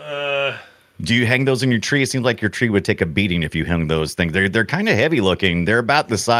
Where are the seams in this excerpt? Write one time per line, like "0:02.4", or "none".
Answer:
none